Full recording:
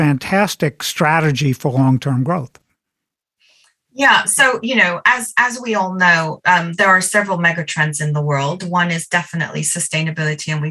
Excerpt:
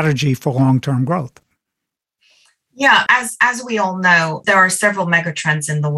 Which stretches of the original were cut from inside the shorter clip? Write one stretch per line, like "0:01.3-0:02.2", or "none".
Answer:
0:04.3-0:05.0
0:06.4-0:06.8